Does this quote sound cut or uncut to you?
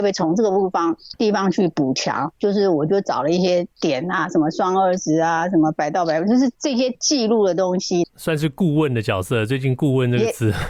cut